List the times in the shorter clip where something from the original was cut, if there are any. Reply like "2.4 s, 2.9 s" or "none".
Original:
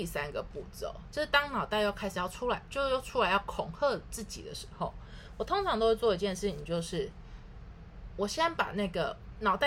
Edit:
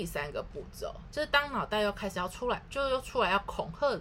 none